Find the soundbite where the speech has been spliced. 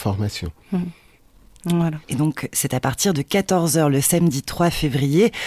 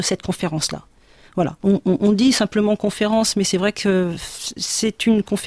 first; 1 cut; at 2.0 s

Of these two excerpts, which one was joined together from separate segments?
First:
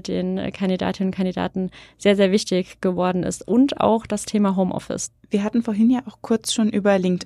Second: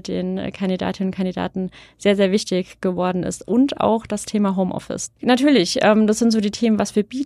second; 1 cut; at 5.2 s

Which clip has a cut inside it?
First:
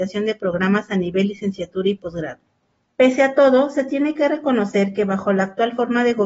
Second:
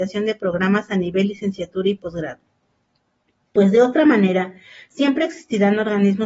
first; 1 cut; at 2.9 s

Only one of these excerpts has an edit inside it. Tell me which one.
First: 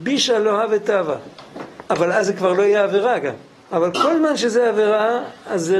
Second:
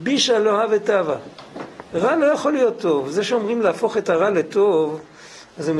first; 2 cuts; at 1.9 s, 3.7 s

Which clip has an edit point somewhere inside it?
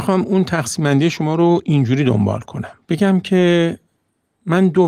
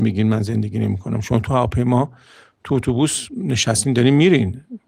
first; 1 cut; at 2.8 s

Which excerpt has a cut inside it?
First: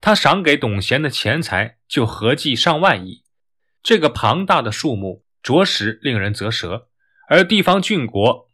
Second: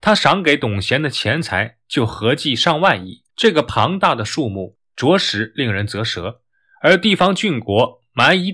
second; 1 cut; at 3.3 s

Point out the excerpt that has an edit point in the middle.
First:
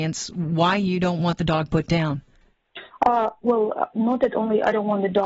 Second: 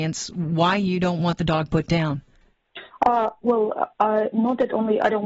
first; 1 cut; at 3.9 s

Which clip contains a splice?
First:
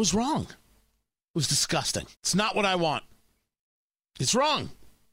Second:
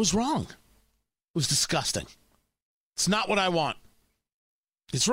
first; 1 cut; at 2.1 s

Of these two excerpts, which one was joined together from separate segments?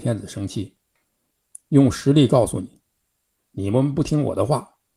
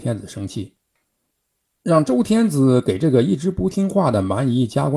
first; 2 cuts; at 1.5 s, 3.4 s

